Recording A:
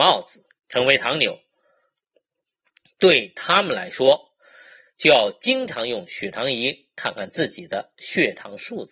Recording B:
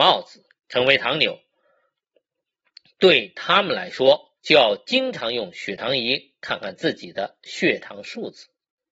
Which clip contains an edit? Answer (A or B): B